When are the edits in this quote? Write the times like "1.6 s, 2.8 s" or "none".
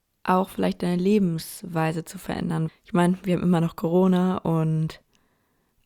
2.7 s